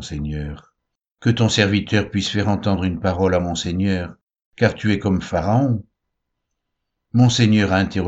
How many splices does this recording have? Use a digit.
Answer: 1